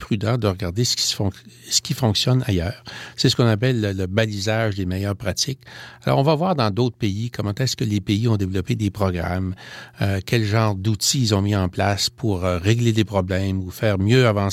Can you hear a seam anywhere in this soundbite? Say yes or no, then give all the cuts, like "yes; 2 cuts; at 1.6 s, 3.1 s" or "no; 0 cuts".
no; 0 cuts